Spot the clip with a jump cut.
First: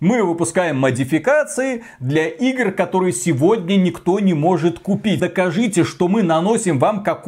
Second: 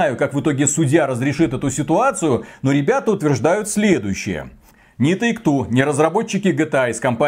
first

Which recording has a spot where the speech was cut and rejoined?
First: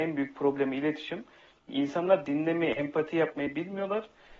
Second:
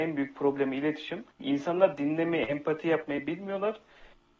second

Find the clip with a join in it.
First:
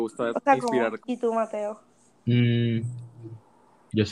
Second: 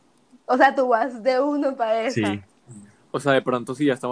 first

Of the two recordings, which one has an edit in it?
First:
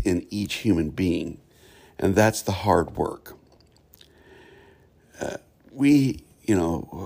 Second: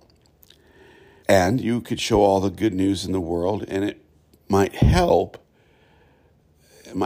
second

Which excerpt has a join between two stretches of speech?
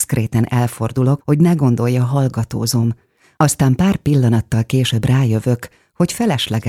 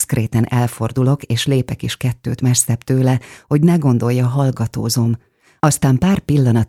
first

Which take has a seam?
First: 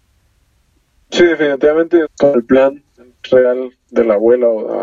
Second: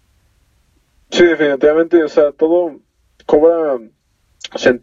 first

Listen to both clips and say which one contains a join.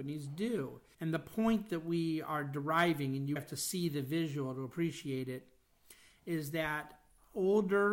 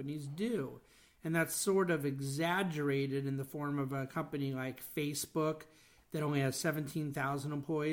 first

